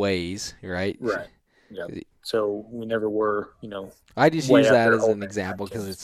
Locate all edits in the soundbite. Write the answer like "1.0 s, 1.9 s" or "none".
2.1 s